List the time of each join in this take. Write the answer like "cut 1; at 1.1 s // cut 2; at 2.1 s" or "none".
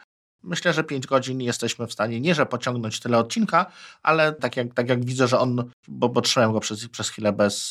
cut 1; at 4.4 s // cut 2; at 5.8 s